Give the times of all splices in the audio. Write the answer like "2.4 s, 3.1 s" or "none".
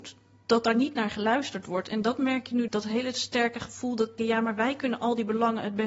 2.7 s, 4.2 s